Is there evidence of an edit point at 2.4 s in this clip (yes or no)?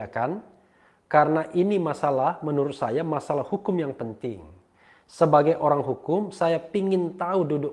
no